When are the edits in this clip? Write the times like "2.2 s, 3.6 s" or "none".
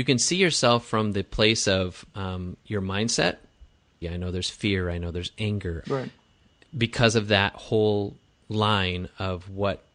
4.0 s, 5.8 s